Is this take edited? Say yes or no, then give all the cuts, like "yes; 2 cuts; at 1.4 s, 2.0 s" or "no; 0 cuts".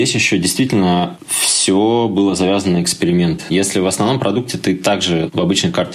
no; 0 cuts